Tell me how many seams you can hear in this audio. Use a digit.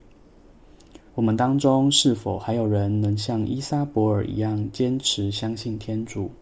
1